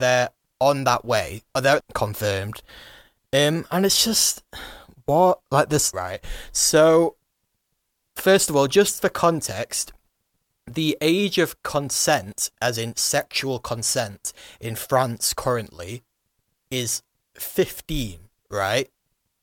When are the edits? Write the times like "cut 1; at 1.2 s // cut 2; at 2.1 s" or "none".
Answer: cut 1; at 1.8 s // cut 2; at 5.9 s